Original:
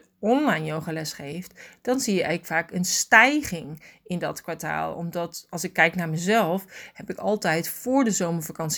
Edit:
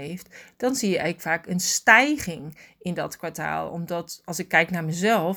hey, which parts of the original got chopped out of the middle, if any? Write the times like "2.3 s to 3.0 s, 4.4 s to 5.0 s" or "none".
none